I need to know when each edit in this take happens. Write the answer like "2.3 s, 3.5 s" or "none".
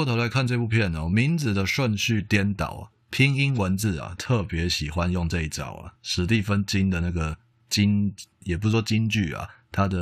none